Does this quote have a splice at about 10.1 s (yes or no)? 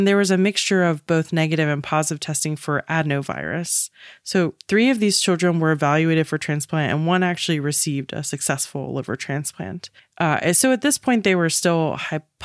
no